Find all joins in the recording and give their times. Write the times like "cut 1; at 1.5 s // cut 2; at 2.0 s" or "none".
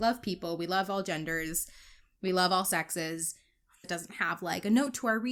cut 1; at 3.8 s